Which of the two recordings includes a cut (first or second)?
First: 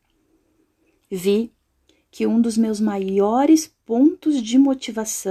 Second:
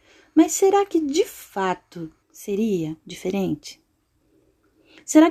second